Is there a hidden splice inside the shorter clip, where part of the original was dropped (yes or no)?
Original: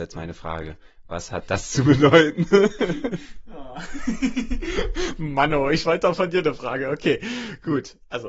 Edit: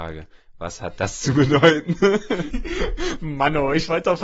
yes